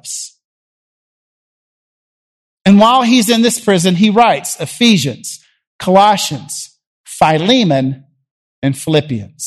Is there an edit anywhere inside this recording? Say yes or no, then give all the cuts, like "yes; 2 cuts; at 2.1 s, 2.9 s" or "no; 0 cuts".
no; 0 cuts